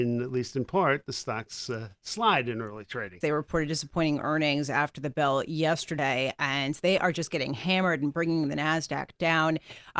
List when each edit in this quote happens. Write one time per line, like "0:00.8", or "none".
0:03.2